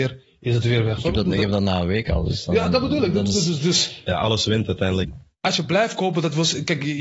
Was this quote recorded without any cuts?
no; 2 cuts; at 1.0 s, 5.0 s

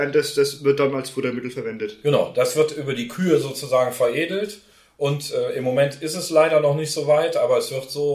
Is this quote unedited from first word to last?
yes; 0 cuts

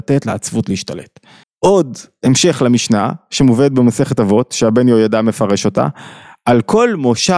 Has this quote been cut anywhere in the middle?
yes; 1 cut; at 1.4 s

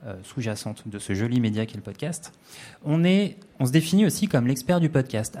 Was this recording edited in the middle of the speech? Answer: no; 0 cuts

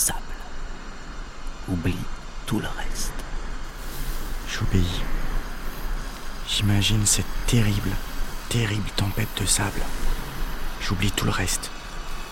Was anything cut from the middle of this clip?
no; 0 cuts

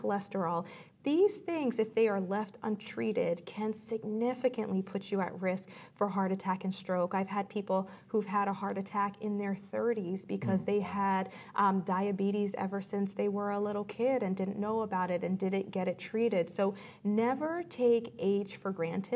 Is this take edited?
no; 0 cuts

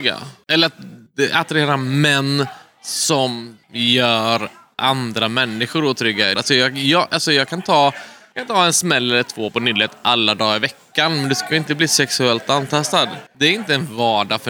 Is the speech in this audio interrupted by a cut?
yes; 1 cut; at 6.4 s

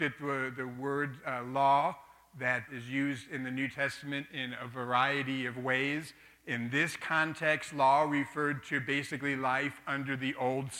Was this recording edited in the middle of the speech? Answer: yes; 1 cut; at 2.7 s

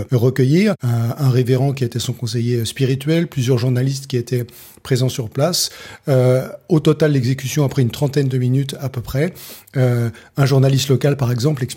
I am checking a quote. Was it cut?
no; 0 cuts

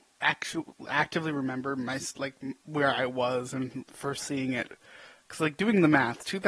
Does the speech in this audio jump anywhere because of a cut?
no; 0 cuts

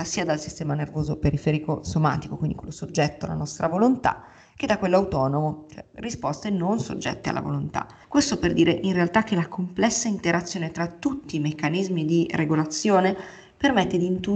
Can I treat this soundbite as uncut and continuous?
no; 1 cut; at 8.0 s

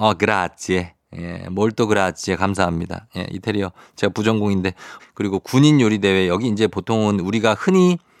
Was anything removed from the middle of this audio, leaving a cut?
yes; 1 cut; at 5.0 s

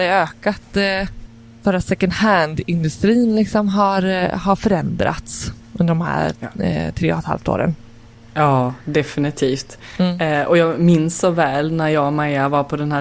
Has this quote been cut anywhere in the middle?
no; 0 cuts

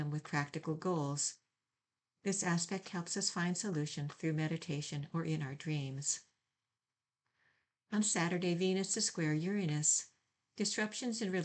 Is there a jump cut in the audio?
no; 0 cuts

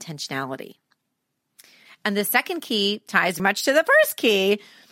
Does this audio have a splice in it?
yes; 2 cuts; at 1.9 s, 3.4 s

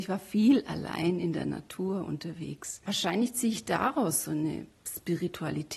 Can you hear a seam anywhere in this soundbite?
yes; 1 cut; at 2.8 s

